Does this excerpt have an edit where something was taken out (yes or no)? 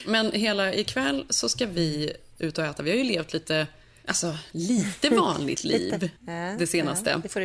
yes